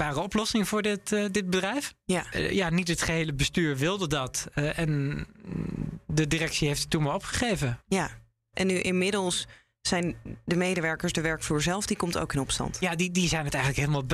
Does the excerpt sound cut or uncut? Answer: uncut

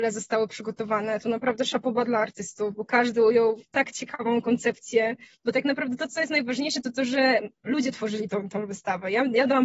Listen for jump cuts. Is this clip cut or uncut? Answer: uncut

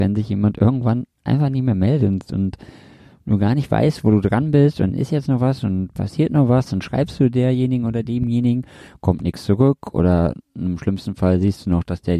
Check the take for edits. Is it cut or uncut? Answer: uncut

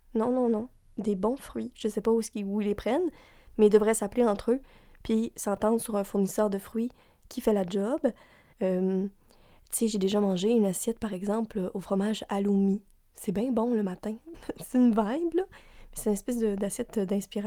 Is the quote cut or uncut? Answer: cut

